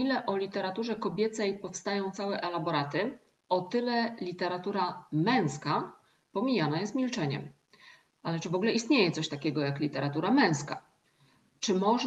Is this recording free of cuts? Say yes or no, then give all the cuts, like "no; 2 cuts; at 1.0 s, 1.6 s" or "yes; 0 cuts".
yes; 0 cuts